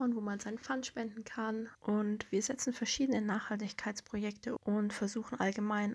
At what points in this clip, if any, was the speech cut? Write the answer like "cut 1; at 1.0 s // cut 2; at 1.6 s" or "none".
cut 1; at 1.7 s // cut 2; at 4.6 s